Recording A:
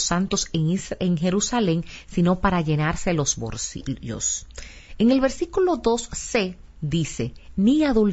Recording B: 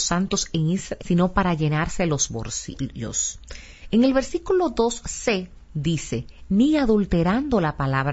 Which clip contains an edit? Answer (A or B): B